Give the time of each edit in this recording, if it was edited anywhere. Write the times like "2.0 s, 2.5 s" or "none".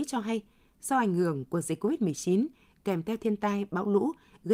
none